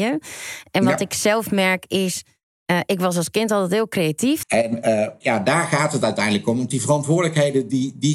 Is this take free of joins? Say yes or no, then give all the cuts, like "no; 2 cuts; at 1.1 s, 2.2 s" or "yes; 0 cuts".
no; 1 cut; at 4.4 s